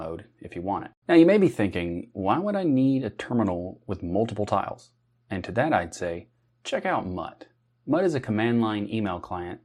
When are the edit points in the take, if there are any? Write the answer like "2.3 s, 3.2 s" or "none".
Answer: 1.0 s